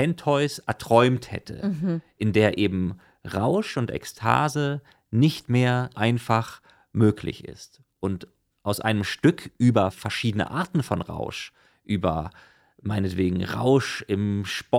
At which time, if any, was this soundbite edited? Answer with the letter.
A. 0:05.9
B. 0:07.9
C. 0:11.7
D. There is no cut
A